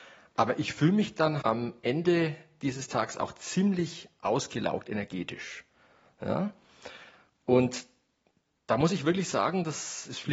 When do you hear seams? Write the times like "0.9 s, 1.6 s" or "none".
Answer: 1.4 s